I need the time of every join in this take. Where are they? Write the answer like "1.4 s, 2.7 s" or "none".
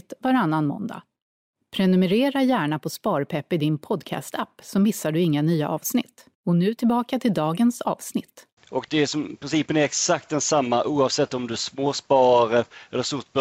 6.3 s, 8.6 s